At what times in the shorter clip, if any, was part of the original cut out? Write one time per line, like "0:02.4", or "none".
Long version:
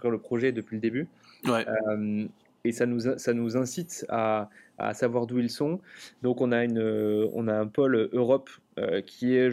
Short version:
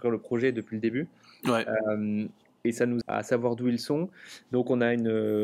0:03.0